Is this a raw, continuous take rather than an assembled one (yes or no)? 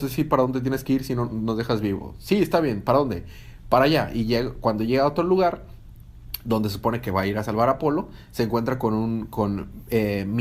yes